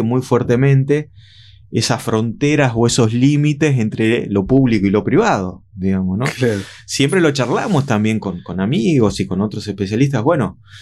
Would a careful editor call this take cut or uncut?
uncut